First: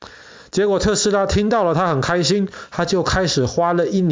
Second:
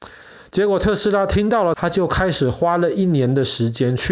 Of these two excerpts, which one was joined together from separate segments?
second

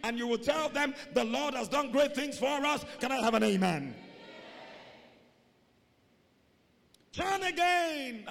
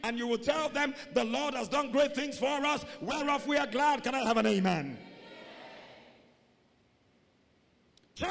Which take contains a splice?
first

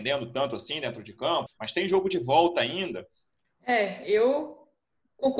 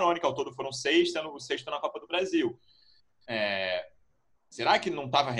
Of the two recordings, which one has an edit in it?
first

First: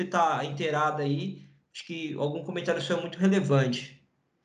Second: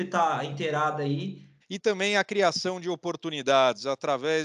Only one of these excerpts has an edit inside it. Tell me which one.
second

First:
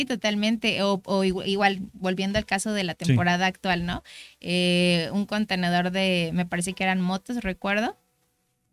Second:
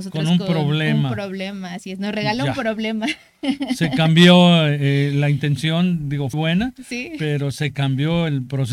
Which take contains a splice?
second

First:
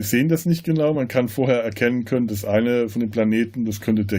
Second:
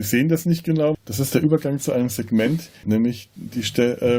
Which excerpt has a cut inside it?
second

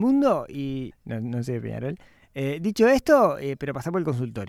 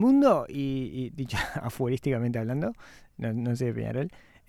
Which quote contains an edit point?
first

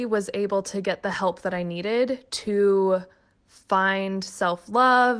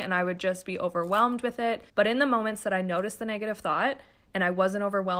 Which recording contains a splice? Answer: second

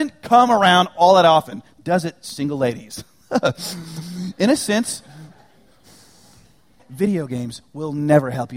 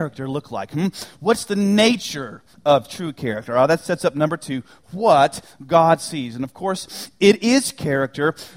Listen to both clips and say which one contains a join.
first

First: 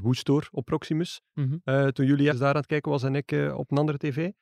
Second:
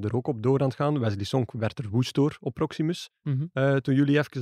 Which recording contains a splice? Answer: first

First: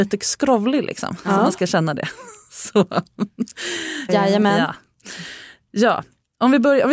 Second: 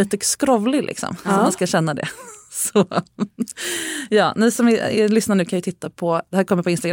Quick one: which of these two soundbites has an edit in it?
first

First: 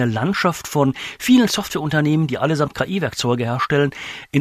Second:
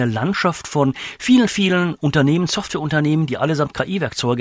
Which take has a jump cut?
first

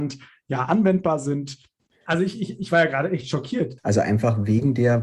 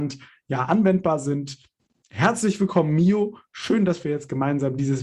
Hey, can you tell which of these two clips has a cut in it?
first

